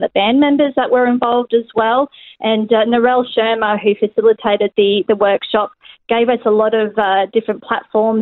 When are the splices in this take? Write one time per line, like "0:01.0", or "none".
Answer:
none